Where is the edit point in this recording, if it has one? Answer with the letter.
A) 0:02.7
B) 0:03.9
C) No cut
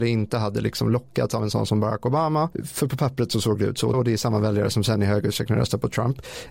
B